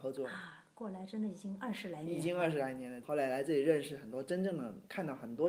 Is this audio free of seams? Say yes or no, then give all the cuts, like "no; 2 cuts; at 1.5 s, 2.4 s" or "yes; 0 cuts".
no; 1 cut; at 3.0 s